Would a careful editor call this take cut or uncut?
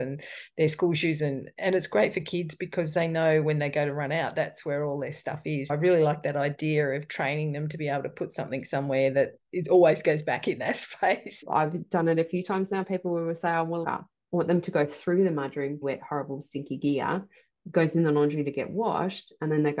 cut